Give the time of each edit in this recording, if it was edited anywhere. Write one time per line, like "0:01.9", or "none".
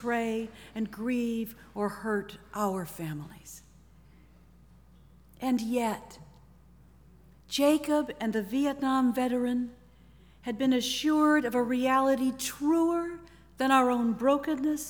none